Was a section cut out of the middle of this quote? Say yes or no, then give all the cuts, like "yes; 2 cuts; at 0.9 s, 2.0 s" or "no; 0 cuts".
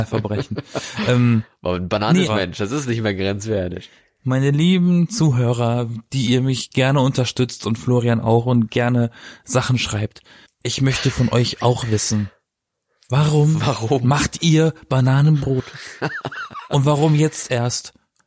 yes; 1 cut; at 2.3 s